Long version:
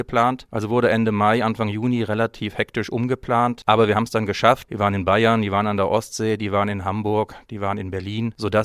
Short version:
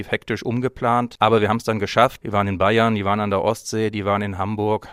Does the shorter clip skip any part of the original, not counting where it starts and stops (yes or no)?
no